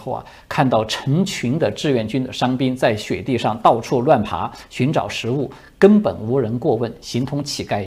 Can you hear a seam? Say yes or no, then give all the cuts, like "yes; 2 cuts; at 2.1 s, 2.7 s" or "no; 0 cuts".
no; 0 cuts